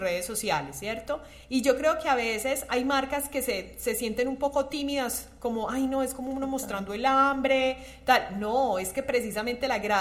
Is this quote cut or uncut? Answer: uncut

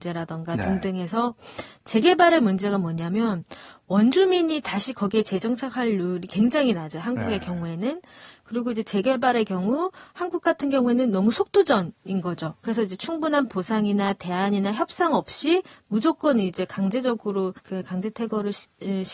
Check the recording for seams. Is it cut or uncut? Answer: cut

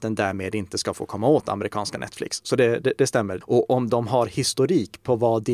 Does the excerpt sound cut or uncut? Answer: cut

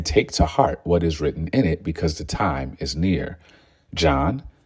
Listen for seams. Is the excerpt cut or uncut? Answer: uncut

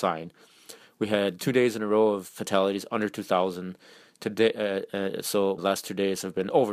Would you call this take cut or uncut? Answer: cut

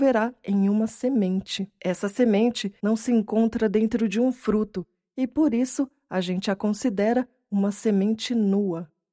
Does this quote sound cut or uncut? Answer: cut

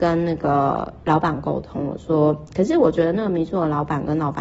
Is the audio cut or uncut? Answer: uncut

